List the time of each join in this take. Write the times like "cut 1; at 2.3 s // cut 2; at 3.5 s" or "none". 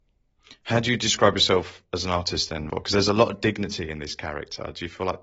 cut 1; at 2.7 s